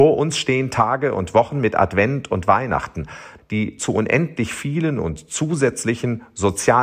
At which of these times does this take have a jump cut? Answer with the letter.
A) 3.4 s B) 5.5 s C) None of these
A